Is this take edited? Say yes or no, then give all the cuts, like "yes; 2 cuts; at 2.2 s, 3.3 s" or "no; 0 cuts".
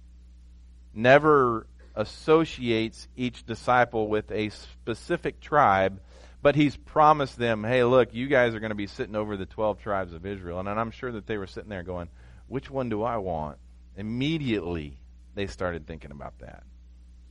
no; 0 cuts